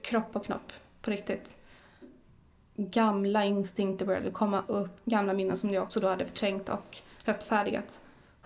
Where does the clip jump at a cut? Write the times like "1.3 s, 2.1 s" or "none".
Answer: 5.0 s